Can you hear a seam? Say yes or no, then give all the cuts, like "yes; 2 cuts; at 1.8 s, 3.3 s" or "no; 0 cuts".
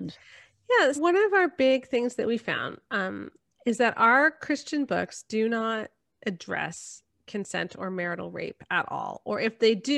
yes; 1 cut; at 1.0 s